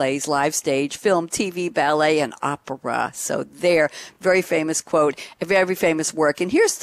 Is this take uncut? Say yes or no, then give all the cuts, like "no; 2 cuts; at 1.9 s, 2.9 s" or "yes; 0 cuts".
yes; 0 cuts